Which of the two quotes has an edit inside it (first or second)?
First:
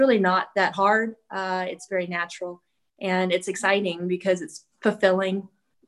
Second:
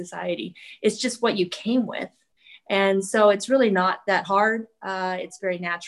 first